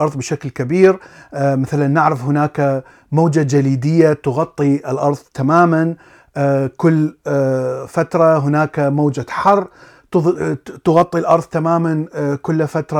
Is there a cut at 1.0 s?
no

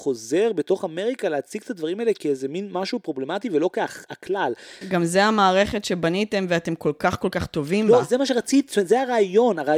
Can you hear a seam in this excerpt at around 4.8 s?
yes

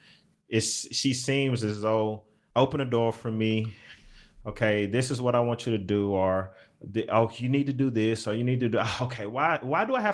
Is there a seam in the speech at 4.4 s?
no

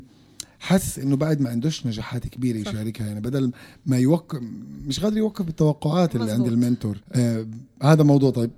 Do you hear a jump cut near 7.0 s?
yes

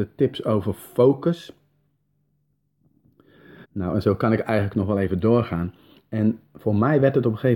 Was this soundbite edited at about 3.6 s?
yes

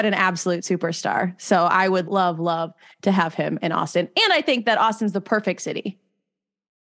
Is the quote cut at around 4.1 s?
no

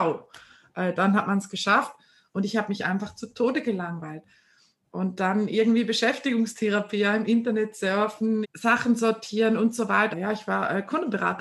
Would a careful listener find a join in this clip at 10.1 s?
yes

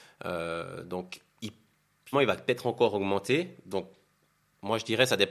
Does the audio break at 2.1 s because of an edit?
yes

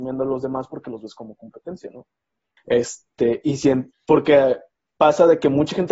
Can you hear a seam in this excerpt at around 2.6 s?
yes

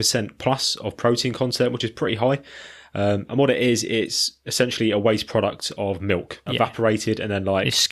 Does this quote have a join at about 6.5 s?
yes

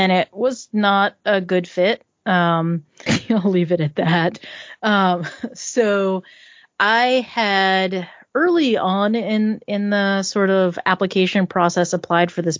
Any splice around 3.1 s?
yes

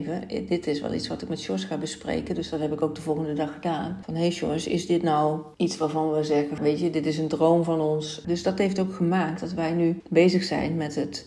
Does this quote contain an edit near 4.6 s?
no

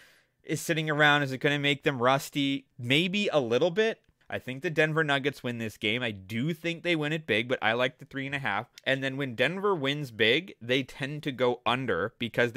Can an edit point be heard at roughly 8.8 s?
yes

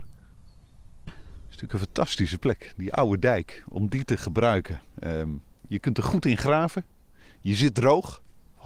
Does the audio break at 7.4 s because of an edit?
no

